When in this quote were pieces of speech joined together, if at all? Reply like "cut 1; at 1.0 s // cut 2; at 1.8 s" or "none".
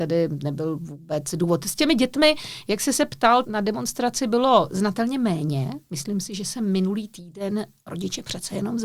cut 1; at 3.4 s